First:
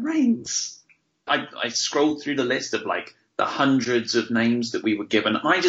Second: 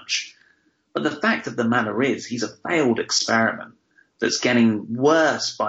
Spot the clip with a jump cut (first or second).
first